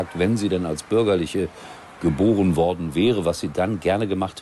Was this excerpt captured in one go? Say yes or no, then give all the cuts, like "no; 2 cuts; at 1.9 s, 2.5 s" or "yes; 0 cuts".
yes; 0 cuts